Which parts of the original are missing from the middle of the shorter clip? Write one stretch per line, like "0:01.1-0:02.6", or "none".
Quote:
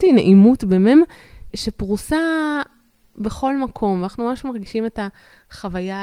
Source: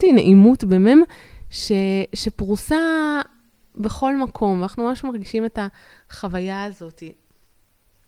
0:01.5-0:02.1